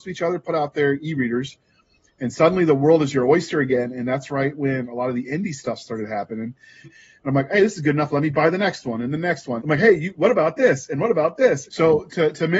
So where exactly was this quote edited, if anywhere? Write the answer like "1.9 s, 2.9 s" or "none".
6.8 s, 9.6 s, 11.7 s